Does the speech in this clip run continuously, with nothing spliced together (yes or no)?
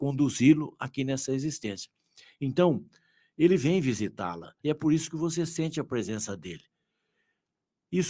no